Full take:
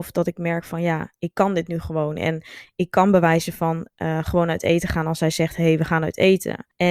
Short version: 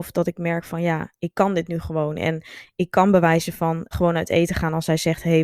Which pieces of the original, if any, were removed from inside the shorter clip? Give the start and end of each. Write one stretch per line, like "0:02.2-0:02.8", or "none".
0:03.9-0:04.2